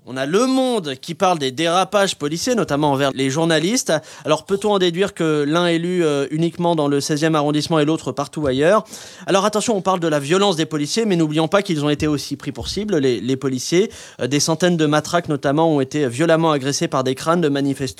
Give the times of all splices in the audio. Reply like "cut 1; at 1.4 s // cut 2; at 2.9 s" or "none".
cut 1; at 3.1 s